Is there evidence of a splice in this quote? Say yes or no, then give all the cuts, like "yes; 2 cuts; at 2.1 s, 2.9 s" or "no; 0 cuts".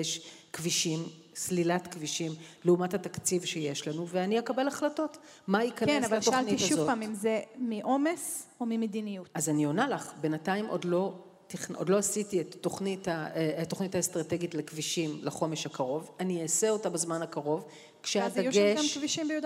no; 0 cuts